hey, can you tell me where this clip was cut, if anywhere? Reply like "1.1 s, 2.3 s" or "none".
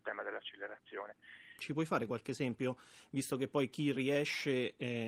1.6 s